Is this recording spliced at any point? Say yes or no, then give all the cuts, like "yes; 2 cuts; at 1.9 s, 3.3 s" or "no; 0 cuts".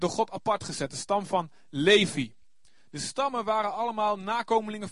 no; 0 cuts